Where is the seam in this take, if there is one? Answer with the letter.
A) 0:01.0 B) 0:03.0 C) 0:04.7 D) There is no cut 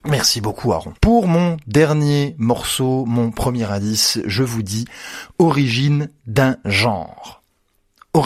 A